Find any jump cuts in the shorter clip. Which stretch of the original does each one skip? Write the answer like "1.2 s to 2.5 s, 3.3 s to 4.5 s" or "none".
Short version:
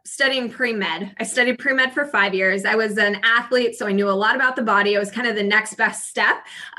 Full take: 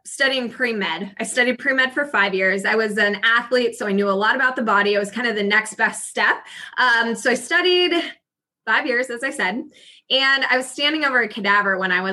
none